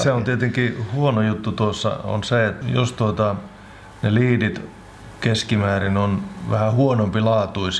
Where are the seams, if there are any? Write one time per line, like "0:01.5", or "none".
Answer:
0:02.6